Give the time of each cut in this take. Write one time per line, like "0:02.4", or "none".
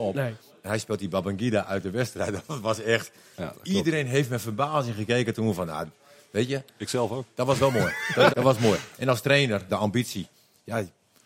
0:08.3
0:09.7